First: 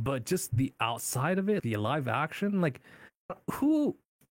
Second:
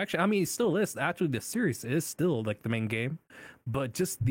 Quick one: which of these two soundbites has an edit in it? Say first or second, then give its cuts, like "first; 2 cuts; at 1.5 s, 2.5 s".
first; 1 cut; at 1.6 s